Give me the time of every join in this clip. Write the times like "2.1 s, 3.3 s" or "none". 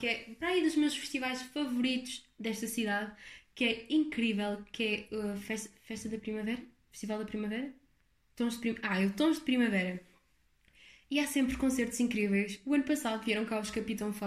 none